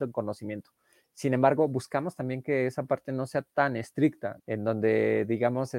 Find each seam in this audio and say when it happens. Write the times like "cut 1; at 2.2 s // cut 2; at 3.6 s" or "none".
cut 1; at 1.0 s // cut 2; at 4.4 s